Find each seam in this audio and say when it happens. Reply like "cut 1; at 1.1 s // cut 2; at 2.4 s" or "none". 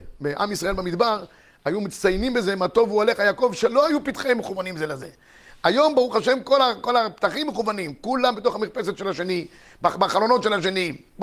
none